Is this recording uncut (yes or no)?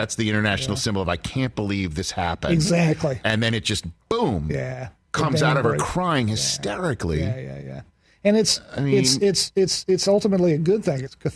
yes